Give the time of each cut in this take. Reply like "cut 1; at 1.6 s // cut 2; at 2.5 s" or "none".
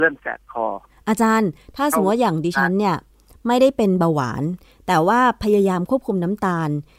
none